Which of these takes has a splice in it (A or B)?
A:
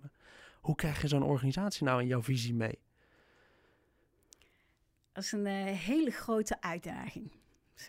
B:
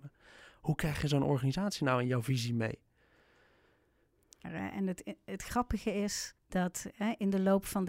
B